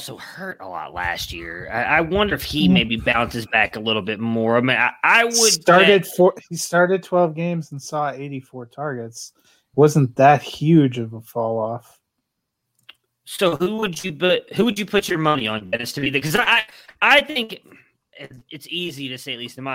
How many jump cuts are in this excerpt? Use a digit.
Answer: 0